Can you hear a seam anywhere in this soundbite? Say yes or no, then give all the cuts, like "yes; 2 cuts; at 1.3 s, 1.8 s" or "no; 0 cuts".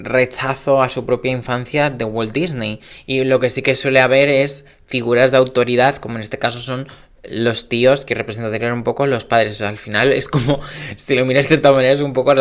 yes; 1 cut; at 3.0 s